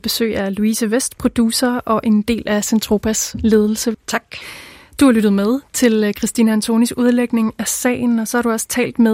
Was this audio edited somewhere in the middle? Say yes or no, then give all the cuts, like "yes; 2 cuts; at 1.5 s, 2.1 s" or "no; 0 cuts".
yes; 1 cut; at 3.9 s